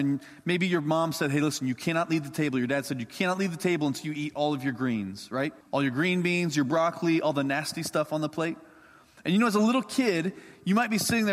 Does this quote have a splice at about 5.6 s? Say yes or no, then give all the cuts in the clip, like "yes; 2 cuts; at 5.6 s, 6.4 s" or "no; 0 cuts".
yes; 1 cut; at 5.6 s